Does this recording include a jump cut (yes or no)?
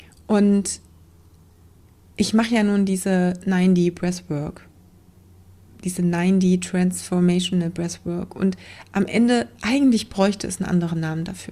no